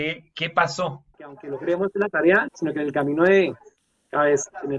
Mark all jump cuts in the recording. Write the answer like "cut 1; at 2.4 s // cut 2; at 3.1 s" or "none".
cut 1; at 1.1 s // cut 2; at 2.5 s